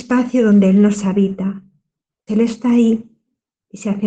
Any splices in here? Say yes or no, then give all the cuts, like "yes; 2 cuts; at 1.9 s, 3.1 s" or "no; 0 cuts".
yes; 1 cut; at 2.3 s